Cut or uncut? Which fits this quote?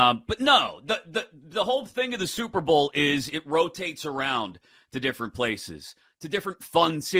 uncut